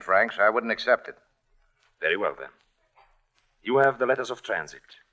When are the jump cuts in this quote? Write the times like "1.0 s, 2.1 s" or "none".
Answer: none